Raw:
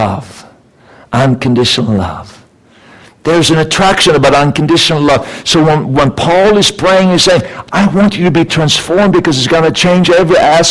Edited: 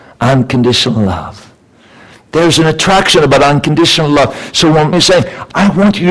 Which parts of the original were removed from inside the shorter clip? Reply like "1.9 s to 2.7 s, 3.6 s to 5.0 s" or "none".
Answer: 5.8 s to 7.1 s